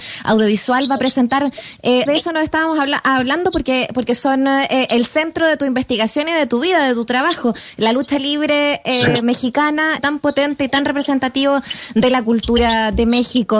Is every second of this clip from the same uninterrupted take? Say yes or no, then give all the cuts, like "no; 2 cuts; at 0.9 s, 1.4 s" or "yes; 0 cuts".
no; 2 cuts; at 2.1 s, 10.0 s